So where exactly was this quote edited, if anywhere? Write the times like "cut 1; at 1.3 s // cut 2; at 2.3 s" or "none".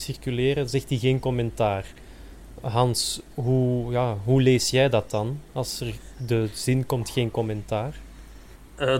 none